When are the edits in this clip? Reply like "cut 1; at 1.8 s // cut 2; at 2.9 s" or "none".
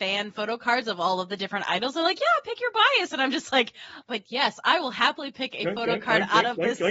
cut 1; at 4.1 s

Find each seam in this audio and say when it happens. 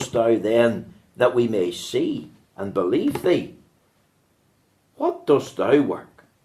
none

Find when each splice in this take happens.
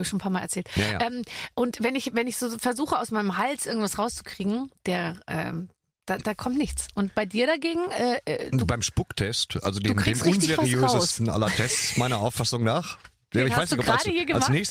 none

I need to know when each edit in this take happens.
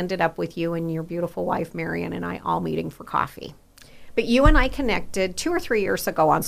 cut 1; at 3.8 s

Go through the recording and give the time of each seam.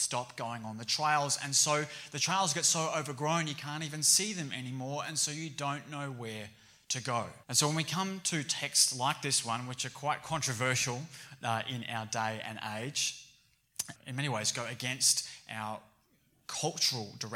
cut 1; at 7.4 s // cut 2; at 14.0 s

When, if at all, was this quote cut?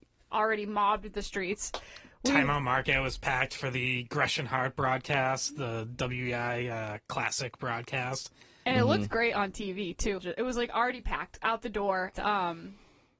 cut 1; at 10.2 s // cut 2; at 12.1 s

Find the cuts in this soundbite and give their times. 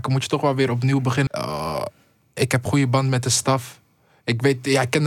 cut 1; at 1.3 s // cut 2; at 2.7 s

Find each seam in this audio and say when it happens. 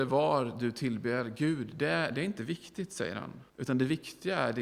cut 1; at 3.5 s

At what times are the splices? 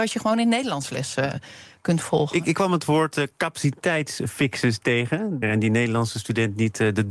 cut 1; at 5.4 s

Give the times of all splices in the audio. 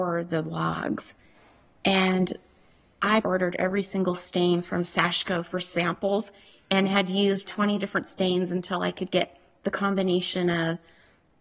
cut 1; at 3.2 s // cut 2; at 7.4 s

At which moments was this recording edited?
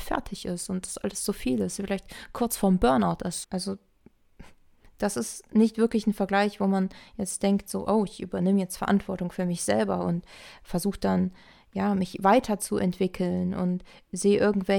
cut 1; at 3.4 s

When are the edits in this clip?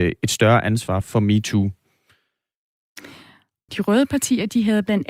cut 1; at 1.0 s // cut 2; at 3.7 s

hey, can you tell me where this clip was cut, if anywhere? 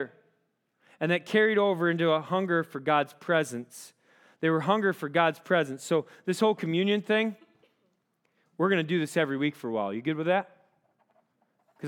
none

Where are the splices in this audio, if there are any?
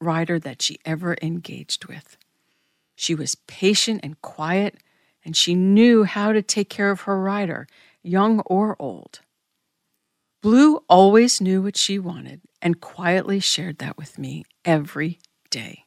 none

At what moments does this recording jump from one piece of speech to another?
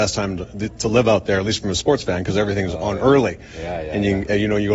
none

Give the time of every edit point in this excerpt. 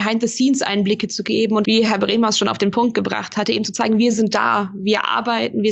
cut 1; at 1.6 s

